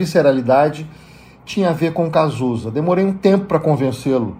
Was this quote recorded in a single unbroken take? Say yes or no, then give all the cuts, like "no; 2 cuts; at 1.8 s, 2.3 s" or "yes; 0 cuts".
yes; 0 cuts